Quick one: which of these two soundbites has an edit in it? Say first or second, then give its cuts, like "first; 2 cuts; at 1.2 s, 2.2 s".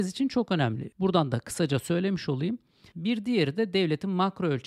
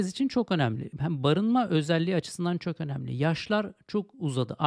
first; 2 cuts; at 0.9 s, 2.9 s